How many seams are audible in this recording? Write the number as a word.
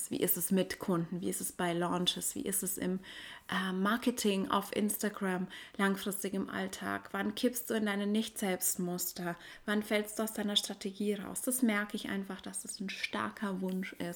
zero